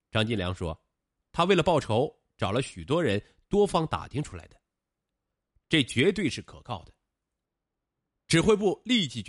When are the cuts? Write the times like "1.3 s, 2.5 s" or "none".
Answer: none